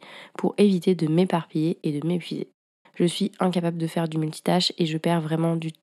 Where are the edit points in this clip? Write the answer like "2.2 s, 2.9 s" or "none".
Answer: 2.8 s